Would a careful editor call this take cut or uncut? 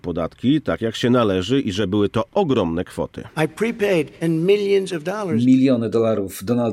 cut